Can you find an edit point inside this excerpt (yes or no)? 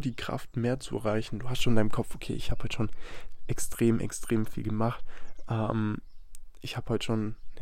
no